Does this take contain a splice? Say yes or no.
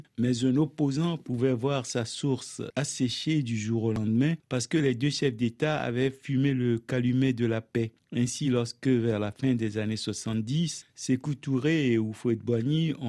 no